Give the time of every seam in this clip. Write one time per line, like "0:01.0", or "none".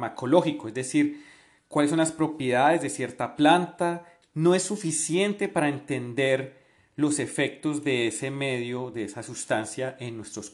0:04.2